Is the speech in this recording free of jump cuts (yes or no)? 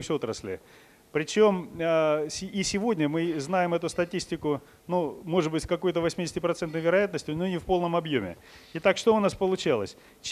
yes